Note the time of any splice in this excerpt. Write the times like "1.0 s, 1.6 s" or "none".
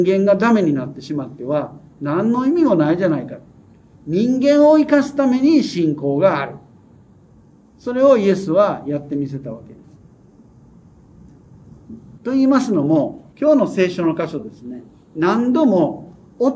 12.2 s, 13.3 s